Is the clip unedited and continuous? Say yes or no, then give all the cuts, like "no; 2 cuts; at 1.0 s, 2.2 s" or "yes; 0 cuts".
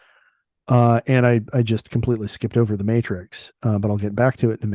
yes; 0 cuts